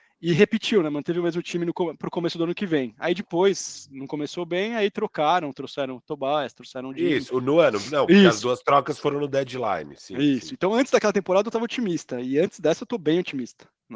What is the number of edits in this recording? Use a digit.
1